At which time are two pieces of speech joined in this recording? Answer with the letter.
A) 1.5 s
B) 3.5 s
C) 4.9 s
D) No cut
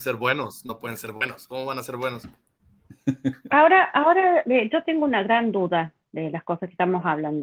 D